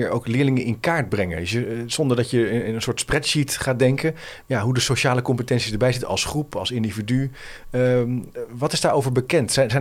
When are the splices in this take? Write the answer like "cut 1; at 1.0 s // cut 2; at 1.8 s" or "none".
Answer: cut 1; at 4.4 s